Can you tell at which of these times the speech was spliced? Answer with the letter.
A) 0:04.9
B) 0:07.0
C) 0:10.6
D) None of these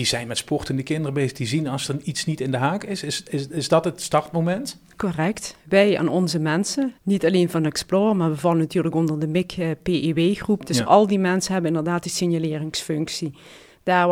B